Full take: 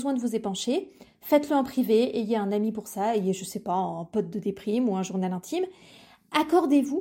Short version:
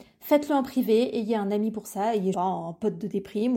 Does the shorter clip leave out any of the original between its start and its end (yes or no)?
yes